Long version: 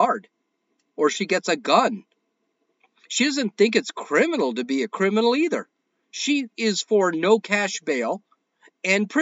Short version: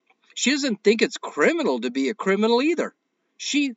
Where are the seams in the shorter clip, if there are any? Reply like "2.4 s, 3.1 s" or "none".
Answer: none